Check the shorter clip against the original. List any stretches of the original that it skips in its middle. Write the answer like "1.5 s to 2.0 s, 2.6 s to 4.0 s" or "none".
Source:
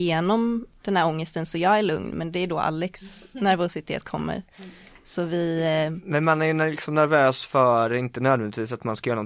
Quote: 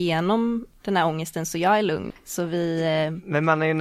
2.1 s to 4.9 s